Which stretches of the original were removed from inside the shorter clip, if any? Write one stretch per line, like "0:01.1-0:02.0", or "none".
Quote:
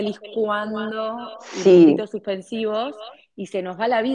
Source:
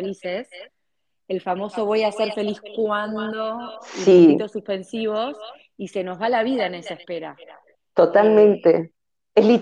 none